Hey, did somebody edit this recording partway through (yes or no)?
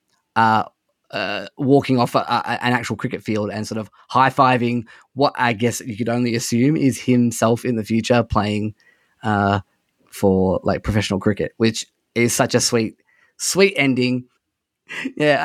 yes